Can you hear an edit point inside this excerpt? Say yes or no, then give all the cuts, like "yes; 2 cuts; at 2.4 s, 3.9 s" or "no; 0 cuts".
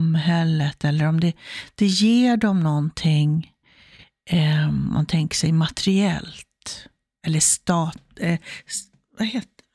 no; 0 cuts